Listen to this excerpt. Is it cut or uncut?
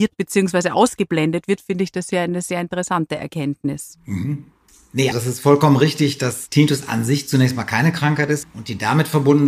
cut